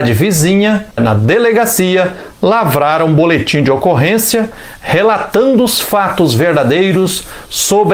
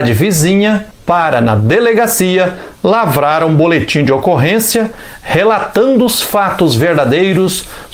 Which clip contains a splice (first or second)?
first